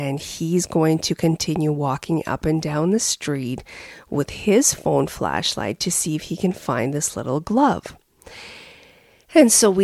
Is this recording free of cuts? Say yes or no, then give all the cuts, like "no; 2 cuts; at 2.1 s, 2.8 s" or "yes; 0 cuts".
yes; 0 cuts